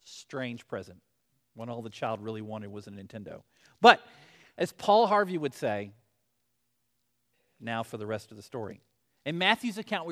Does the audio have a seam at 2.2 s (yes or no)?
no